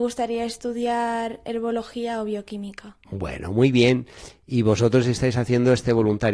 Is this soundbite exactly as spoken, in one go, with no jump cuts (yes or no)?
yes